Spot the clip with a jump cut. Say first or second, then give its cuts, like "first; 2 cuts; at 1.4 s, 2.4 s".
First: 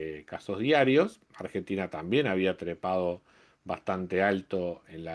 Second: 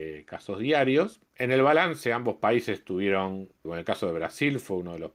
second; 2 cuts; at 1.3 s, 3.7 s